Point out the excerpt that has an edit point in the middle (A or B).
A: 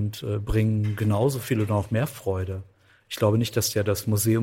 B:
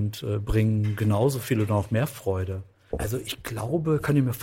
B